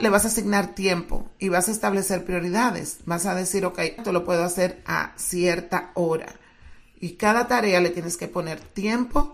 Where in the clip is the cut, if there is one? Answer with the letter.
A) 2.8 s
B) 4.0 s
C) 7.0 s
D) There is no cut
B